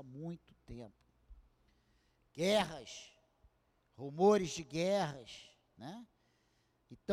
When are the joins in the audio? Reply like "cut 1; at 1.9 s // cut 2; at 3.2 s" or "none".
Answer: none